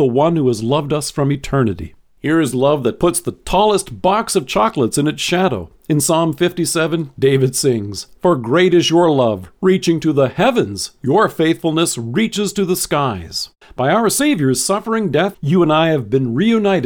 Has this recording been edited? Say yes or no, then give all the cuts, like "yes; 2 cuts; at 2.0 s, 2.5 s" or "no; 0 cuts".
yes; 2 cuts; at 13.6 s, 15.3 s